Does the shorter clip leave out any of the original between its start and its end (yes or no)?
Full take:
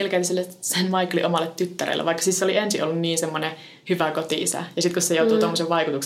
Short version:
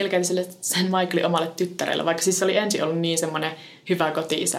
no